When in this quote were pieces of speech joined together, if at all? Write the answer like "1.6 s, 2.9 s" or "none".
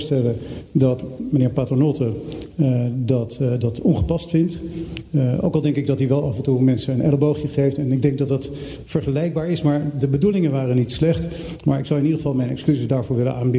none